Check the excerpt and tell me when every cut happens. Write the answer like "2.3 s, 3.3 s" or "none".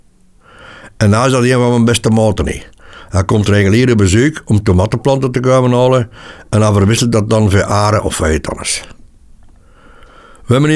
none